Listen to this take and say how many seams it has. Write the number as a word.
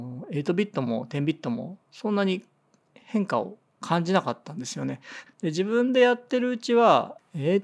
one